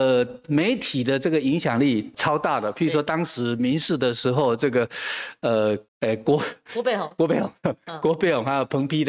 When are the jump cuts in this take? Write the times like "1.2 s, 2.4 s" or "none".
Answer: 2.1 s, 5.9 s